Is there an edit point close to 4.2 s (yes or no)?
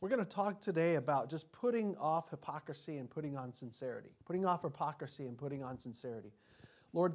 yes